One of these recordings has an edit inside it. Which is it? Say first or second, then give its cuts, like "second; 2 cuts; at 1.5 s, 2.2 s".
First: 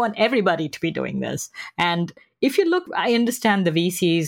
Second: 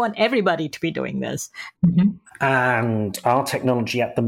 second; 1 cut; at 1.7 s